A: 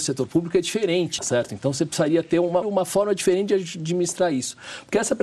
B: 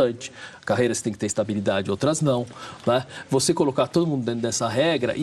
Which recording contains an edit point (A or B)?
A